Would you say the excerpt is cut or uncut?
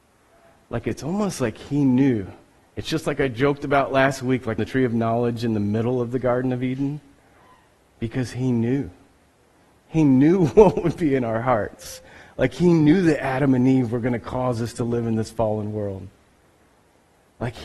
cut